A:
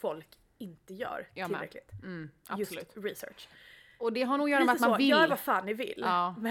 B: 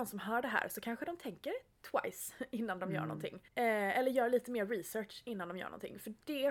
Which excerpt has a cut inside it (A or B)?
B